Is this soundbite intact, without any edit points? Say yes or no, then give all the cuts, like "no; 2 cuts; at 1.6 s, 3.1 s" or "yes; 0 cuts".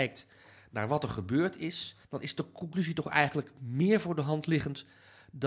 no; 1 cut; at 2.0 s